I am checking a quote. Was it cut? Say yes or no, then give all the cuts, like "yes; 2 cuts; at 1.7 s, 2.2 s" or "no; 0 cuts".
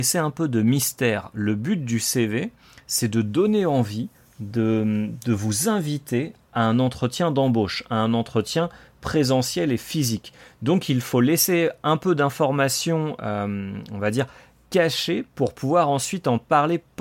no; 0 cuts